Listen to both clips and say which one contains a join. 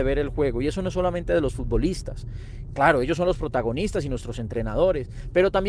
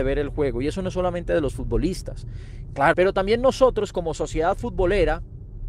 second; 1 cut; at 2.9 s

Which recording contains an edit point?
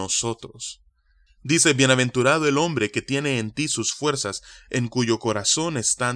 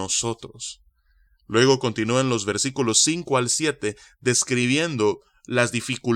first; 1 cut; at 1.3 s

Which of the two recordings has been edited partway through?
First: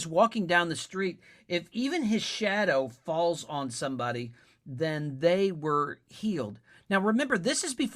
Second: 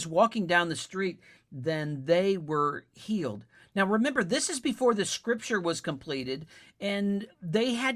second; 1 cut; at 1.4 s

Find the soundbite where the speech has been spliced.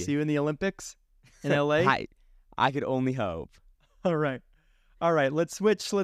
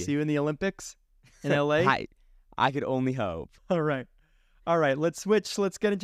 second; 1 cut; at 3.6 s

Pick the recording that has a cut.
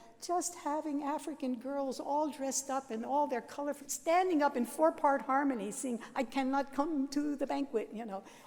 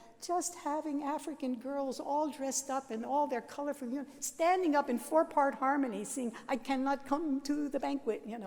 first; 1 cut; at 3.8 s

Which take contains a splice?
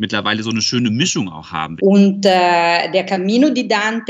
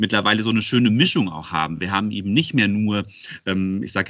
first; 1 cut; at 1.8 s

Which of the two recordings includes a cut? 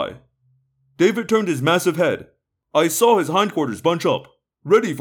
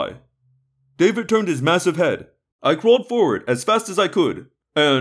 second; 1 cut; at 2.5 s

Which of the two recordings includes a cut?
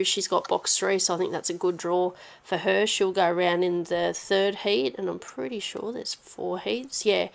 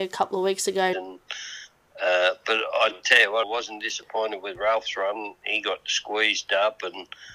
second; 2 cuts; at 0.9 s, 3.4 s

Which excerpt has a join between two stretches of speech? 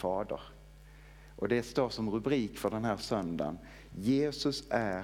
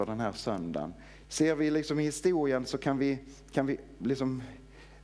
second; 1 cut; at 1.2 s

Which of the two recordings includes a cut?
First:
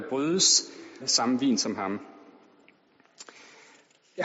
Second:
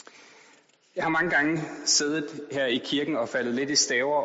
first; 1 cut; at 1.0 s

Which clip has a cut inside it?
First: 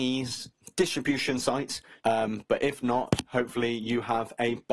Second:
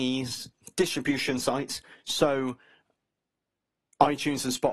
first; 1 cut; at 2.0 s

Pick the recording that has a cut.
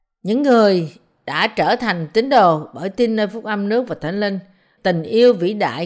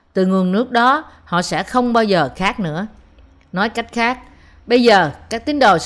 first; 1 cut; at 4.8 s

